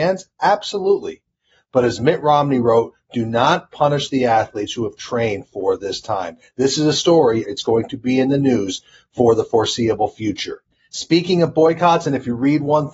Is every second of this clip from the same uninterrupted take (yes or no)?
no